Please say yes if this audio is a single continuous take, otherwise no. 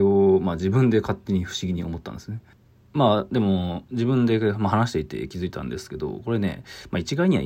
yes